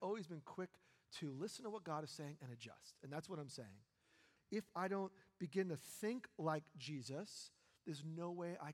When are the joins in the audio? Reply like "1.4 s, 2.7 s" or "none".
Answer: 4.4 s